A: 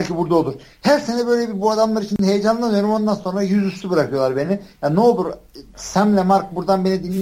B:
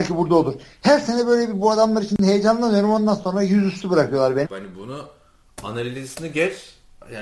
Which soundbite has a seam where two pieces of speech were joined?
B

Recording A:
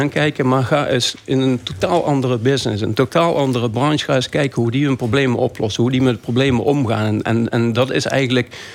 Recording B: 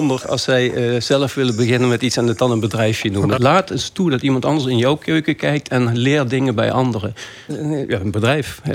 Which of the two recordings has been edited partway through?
B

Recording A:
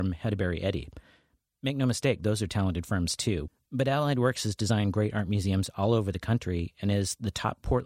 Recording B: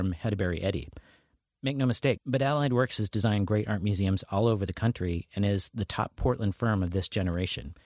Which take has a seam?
B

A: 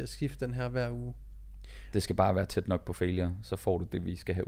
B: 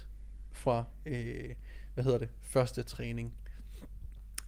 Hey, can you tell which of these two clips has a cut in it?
A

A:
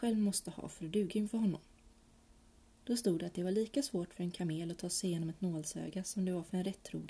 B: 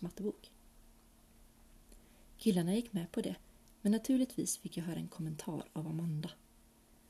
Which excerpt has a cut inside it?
A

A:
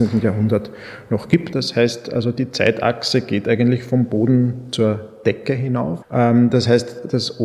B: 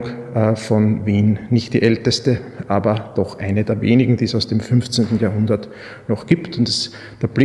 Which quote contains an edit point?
A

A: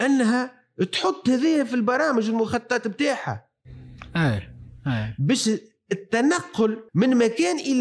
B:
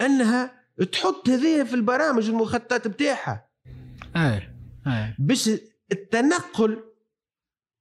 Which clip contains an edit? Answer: A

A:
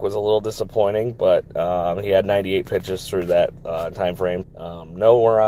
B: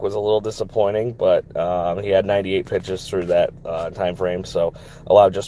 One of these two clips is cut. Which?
A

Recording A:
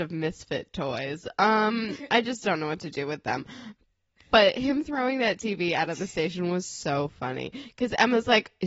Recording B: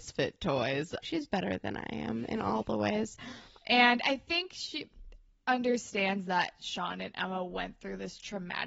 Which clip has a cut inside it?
B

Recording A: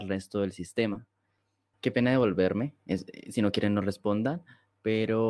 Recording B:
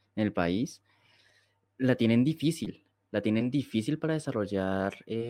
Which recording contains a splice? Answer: A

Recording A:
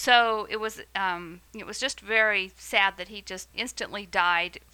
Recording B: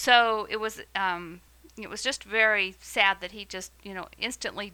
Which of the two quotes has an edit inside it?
A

